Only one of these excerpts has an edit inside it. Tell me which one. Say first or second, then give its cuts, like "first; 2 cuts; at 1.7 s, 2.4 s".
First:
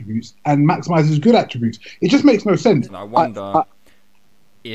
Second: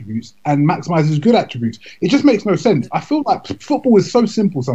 first; 1 cut; at 2.9 s